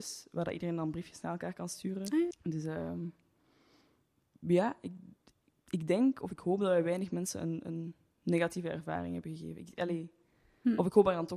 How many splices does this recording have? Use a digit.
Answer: 1